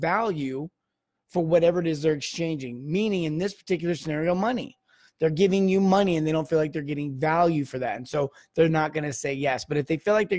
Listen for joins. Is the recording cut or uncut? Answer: uncut